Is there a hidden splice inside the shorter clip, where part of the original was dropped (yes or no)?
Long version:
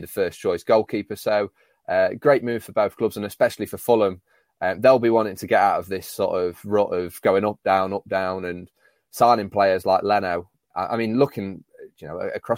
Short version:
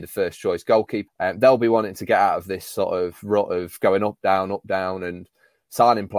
yes